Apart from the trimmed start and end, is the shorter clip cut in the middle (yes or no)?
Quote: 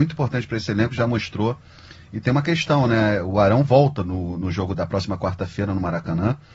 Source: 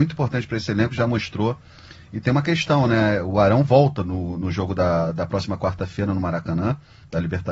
yes